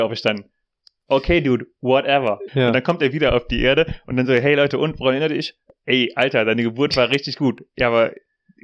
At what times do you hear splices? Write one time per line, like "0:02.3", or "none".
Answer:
0:02.5